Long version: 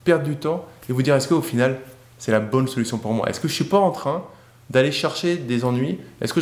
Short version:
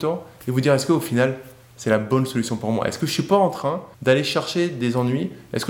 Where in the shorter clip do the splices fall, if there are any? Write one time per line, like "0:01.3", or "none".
0:03.9